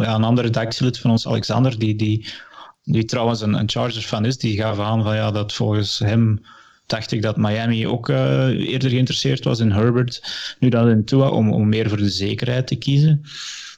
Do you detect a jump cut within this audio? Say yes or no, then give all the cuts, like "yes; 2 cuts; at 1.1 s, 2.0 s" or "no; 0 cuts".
no; 0 cuts